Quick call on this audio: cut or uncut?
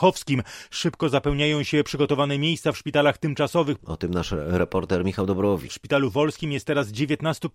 cut